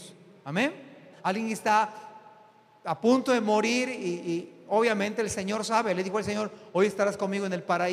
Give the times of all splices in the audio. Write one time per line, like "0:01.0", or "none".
0:01.1